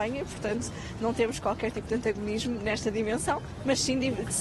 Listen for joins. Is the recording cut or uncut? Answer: uncut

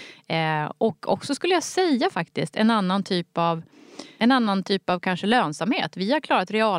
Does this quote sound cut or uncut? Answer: uncut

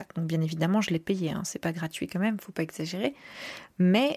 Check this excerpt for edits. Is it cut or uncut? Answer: uncut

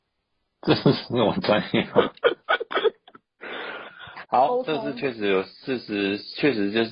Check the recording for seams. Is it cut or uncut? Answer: cut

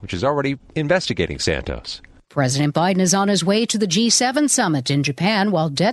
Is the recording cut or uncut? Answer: uncut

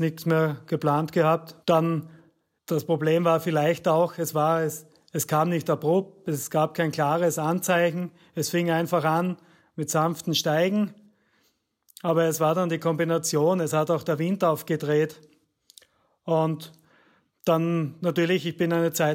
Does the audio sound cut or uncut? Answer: cut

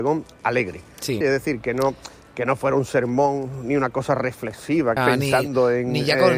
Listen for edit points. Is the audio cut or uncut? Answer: cut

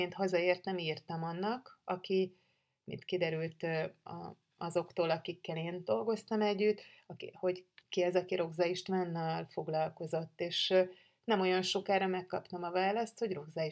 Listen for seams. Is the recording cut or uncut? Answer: uncut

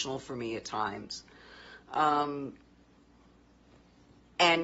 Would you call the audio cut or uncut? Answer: uncut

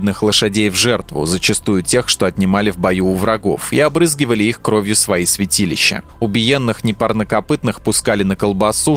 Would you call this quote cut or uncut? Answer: uncut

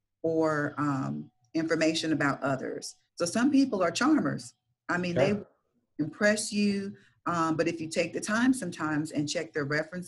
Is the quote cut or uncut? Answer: cut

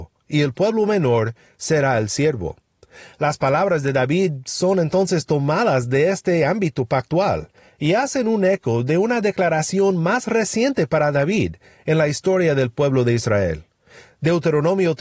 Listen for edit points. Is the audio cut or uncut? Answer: uncut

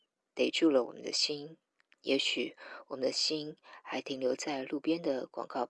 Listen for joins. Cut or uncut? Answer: cut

